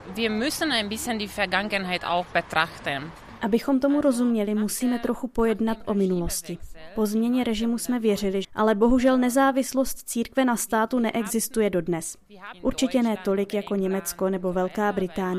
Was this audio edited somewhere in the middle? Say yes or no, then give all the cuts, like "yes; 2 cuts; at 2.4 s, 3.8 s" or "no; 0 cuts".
yes; 2 cuts; at 8.4 s, 12.5 s